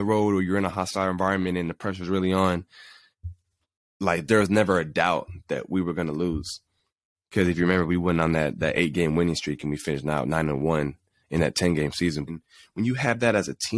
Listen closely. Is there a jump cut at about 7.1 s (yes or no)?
no